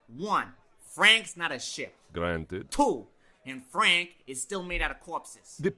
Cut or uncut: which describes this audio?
cut